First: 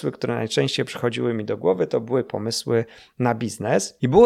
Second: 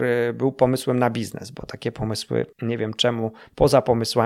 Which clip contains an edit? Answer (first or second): second